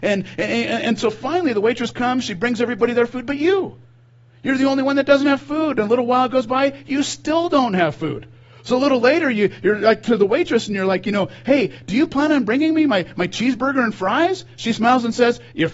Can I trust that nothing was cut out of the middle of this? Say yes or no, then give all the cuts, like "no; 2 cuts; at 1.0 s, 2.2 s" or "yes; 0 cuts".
yes; 0 cuts